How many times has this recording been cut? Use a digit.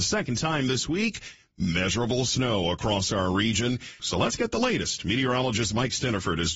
1